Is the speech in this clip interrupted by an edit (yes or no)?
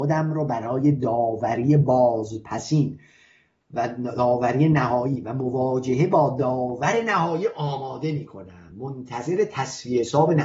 no